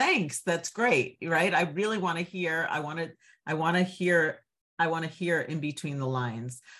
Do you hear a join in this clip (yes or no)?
no